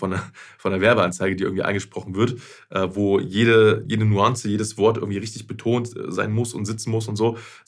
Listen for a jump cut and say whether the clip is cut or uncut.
uncut